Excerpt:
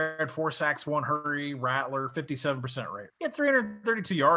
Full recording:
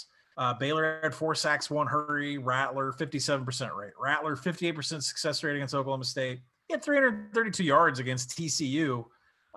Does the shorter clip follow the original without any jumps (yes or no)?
no